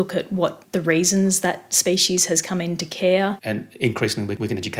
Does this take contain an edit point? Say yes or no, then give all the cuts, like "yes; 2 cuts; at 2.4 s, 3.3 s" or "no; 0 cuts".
yes; 1 cut; at 3.4 s